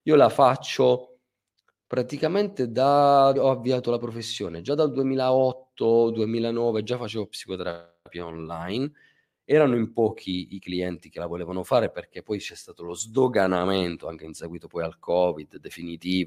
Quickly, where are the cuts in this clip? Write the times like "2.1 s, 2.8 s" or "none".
3.3 s